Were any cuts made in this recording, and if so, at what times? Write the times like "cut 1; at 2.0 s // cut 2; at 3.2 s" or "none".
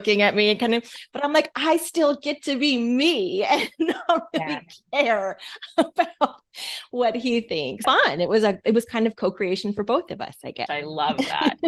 cut 1; at 7.8 s // cut 2; at 10.7 s

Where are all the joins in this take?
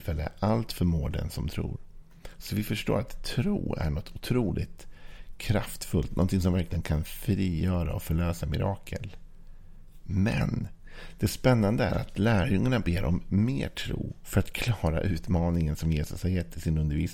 none

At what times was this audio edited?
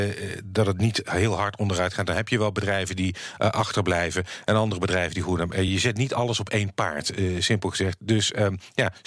none

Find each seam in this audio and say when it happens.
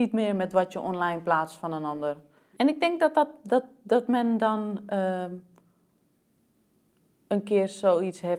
none

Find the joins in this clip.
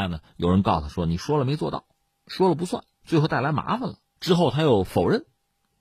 cut 1; at 2.9 s // cut 2; at 4.2 s

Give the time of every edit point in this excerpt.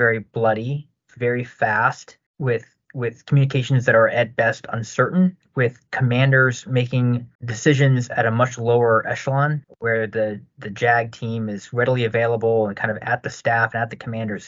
cut 1; at 9.6 s

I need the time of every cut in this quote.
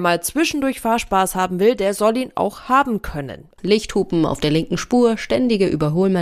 cut 1; at 3.6 s

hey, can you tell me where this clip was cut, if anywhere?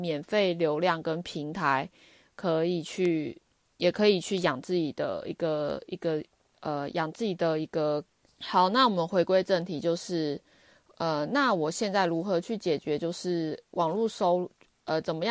cut 1; at 8.2 s

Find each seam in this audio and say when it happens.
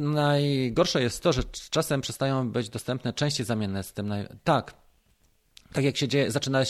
none

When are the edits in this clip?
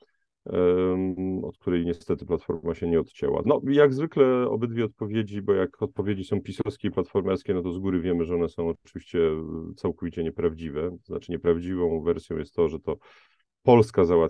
cut 1; at 3.4 s

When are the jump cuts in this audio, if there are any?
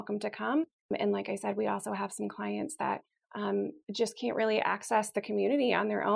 none

